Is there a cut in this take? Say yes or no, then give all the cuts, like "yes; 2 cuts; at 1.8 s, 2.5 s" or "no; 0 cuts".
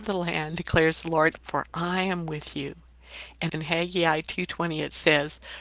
yes; 2 cuts; at 1.4 s, 3.5 s